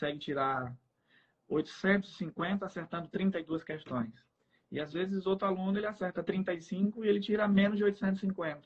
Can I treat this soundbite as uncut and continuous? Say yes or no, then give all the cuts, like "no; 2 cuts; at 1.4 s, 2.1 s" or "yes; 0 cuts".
yes; 0 cuts